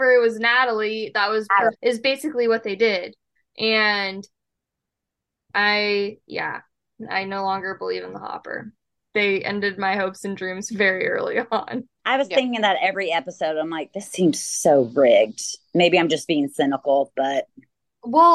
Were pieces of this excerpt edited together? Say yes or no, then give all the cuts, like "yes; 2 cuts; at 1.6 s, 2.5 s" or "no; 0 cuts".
yes; 3 cuts; at 1.7 s, 9.0 s, 11.9 s